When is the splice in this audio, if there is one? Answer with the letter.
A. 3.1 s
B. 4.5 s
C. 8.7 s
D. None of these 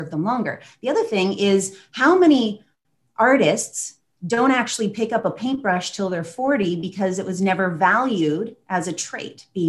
D